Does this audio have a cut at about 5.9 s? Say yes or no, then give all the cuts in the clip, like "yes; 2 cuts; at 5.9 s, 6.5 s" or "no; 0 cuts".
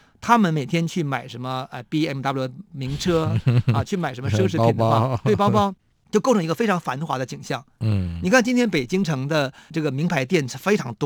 yes; 1 cut; at 5.9 s